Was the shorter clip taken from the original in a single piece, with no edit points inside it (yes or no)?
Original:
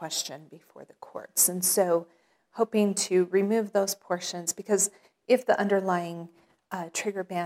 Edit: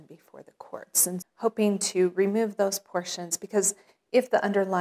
no